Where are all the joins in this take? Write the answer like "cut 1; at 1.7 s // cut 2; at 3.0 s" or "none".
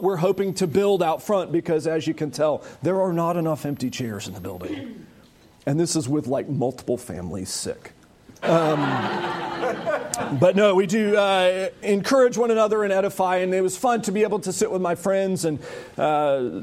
cut 1; at 8.4 s

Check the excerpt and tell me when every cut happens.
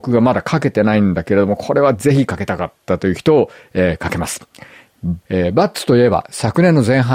cut 1; at 5.2 s

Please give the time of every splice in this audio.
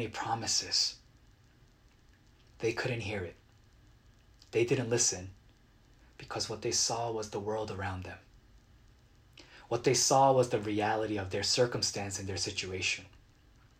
none

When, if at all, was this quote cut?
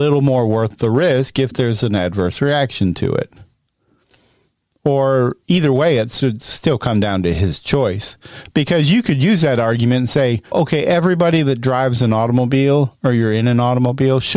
cut 1; at 10.5 s

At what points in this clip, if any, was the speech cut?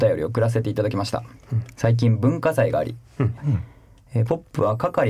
cut 1; at 3.4 s

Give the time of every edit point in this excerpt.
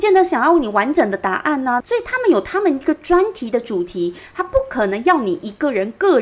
cut 1; at 1.8 s

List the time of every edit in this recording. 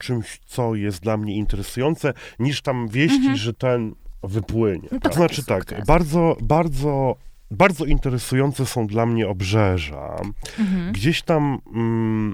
cut 1; at 5.1 s

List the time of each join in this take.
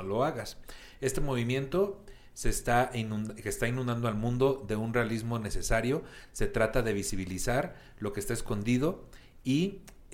none

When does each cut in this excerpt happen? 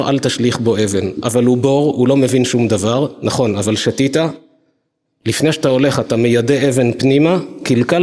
none

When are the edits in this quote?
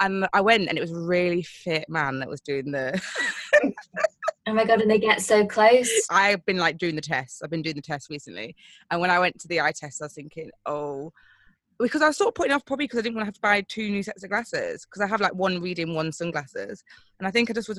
cut 1; at 6.1 s

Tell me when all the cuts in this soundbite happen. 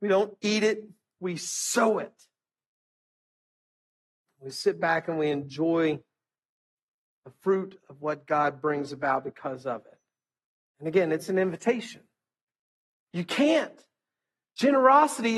cut 1; at 13.1 s

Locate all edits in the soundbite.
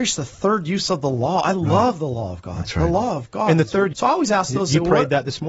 cut 1; at 3.9 s

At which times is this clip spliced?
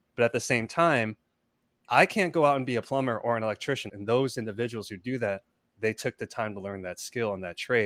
cut 1; at 3.9 s

